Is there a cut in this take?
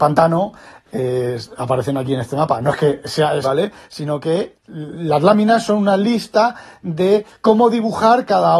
yes; 2 cuts; at 3.4 s, 4.5 s

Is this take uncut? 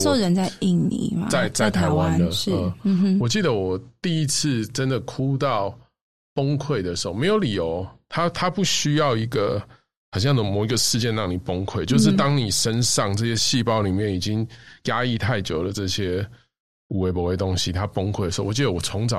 yes; 0 cuts

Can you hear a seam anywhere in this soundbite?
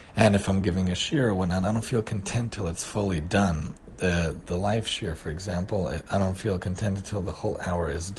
no; 0 cuts

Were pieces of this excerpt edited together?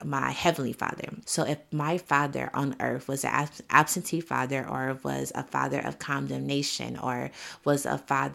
yes; 1 cut; at 1.2 s

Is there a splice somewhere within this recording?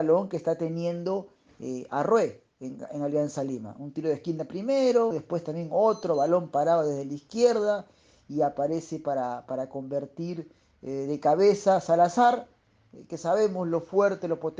yes; 1 cut; at 5.1 s

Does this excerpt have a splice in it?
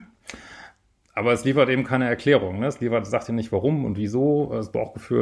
no; 0 cuts

